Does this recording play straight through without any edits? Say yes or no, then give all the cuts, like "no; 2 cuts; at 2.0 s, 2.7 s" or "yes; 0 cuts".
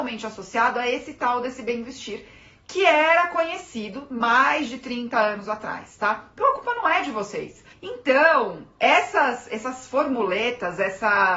no; 1 cut; at 7.7 s